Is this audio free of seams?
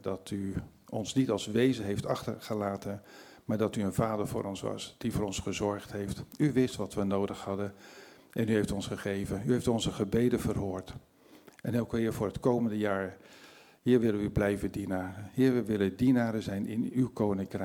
yes; 0 cuts

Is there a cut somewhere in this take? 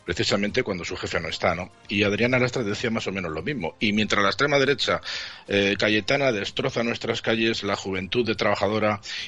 no; 0 cuts

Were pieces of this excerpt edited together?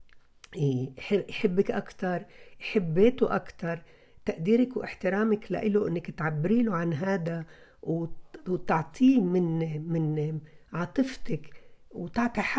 no; 0 cuts

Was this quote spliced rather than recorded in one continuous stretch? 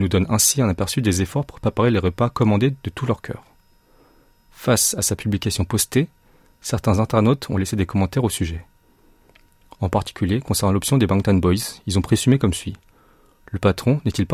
no; 0 cuts

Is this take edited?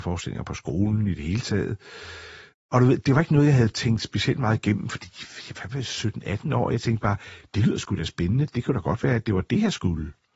yes; 1 cut; at 2.5 s

